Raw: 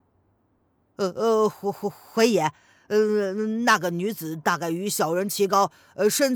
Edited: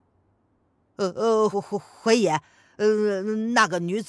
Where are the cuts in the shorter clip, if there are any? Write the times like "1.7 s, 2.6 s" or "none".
1.5 s